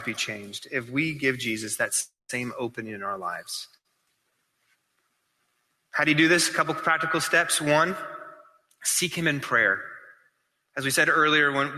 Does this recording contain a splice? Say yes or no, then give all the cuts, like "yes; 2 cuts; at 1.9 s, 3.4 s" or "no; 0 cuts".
no; 0 cuts